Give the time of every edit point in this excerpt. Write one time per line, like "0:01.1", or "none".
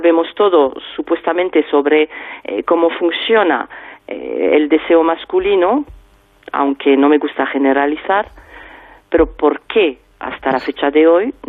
none